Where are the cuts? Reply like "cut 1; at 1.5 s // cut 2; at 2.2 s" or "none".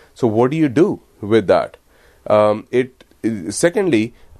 cut 1; at 3.1 s